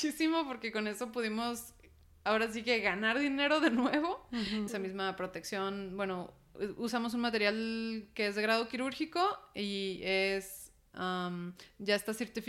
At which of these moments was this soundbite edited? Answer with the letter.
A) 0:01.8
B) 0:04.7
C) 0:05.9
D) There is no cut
B